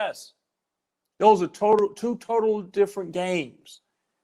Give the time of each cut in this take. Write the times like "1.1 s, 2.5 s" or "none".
none